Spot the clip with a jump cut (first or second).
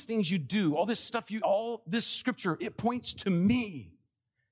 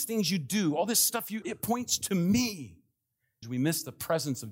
second